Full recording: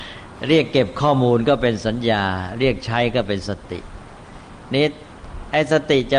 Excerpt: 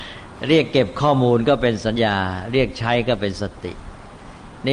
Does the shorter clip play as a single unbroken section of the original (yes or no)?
no